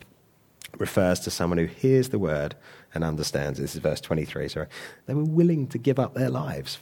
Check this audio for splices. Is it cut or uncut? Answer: cut